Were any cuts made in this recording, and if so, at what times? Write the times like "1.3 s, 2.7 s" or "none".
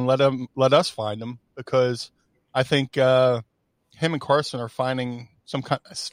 none